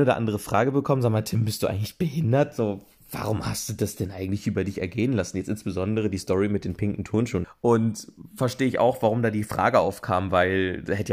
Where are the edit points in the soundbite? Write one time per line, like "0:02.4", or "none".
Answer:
0:07.4